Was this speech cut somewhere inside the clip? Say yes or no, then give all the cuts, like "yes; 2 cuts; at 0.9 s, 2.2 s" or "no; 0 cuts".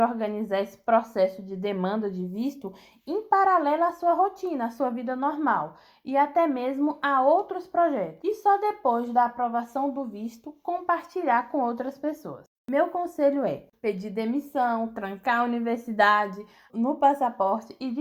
yes; 2 cuts; at 13.7 s, 16.7 s